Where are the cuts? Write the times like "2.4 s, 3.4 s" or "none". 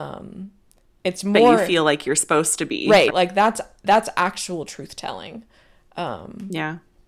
3.1 s